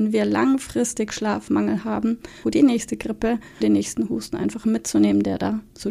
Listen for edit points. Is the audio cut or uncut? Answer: cut